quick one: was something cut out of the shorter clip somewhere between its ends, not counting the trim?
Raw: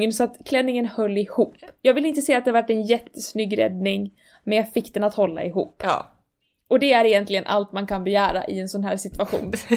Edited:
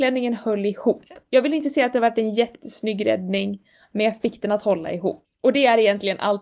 yes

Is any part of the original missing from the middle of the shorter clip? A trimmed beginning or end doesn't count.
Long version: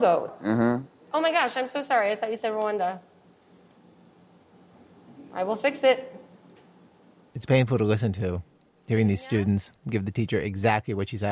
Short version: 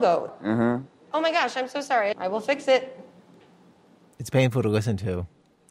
yes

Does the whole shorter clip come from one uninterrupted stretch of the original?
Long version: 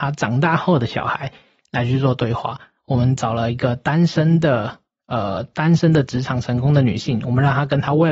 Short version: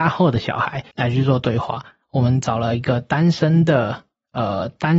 no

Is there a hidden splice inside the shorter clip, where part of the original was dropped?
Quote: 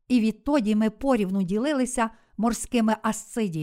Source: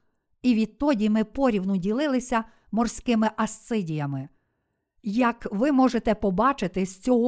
no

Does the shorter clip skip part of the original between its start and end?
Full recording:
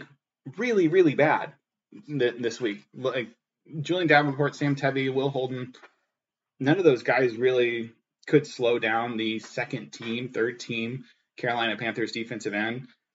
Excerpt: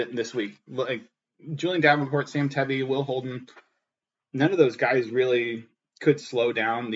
no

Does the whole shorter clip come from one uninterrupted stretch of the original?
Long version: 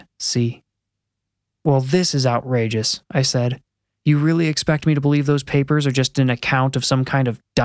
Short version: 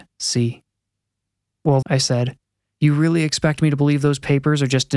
no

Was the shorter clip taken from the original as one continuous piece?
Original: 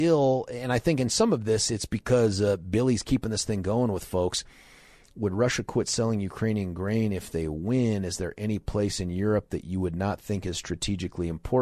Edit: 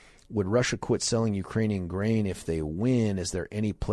yes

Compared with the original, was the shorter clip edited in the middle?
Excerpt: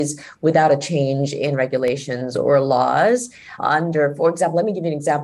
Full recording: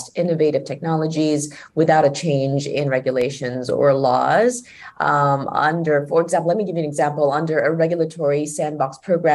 yes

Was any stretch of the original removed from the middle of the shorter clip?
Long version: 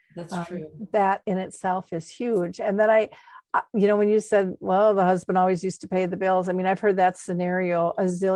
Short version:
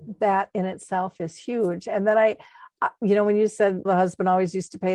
yes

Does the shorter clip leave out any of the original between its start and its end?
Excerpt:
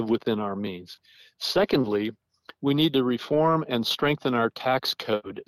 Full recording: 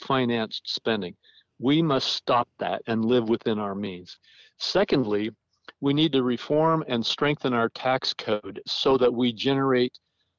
no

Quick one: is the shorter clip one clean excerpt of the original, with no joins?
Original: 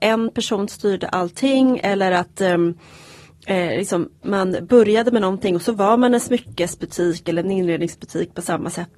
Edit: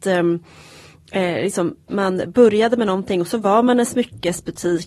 yes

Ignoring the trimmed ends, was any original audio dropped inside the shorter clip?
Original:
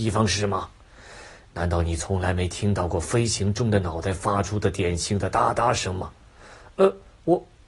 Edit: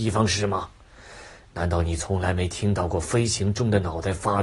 no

